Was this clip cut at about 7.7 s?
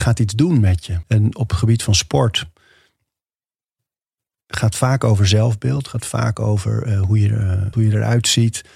yes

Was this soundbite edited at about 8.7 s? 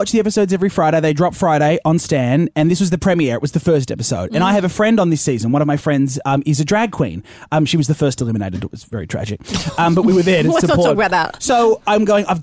no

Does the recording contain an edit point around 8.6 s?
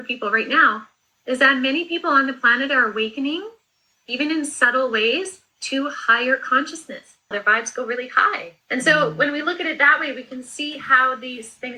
yes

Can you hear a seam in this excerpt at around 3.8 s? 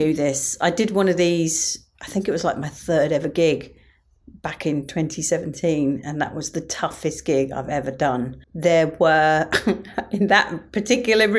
no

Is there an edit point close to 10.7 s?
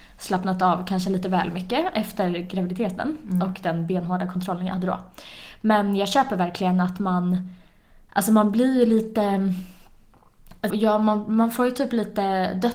yes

